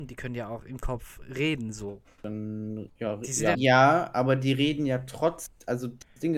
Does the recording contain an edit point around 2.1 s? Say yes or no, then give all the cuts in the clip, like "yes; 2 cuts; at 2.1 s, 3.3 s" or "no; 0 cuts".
no; 1 cut; at 3.5 s